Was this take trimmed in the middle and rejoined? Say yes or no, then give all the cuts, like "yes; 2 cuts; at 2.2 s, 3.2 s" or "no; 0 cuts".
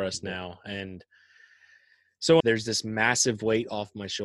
yes; 1 cut; at 2.4 s